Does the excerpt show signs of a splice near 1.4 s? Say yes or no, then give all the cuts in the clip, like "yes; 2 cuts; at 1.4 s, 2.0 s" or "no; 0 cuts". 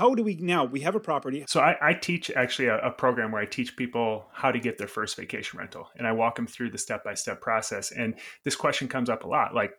yes; 1 cut; at 1.4 s